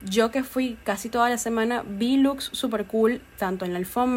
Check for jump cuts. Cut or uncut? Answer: uncut